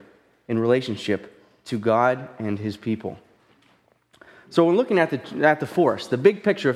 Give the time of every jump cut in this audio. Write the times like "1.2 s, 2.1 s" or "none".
none